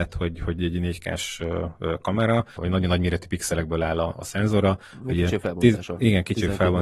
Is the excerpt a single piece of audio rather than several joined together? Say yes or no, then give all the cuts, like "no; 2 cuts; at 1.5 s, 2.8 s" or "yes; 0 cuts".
no; 1 cut; at 2.6 s